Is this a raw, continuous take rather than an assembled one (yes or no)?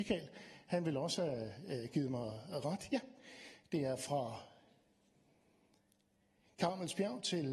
yes